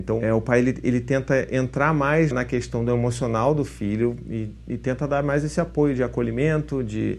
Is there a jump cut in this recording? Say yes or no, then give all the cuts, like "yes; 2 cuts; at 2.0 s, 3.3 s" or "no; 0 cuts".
yes; 1 cut; at 2.3 s